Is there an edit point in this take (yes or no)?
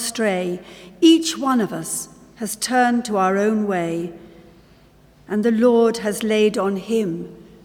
no